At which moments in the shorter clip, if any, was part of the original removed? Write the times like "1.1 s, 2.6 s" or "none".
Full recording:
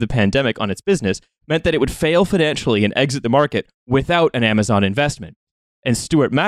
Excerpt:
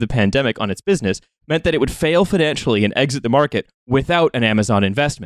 none